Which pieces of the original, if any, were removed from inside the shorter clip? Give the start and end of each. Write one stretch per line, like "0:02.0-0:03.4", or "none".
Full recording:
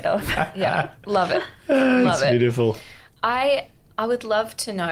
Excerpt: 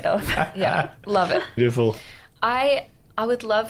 0:01.6-0:02.4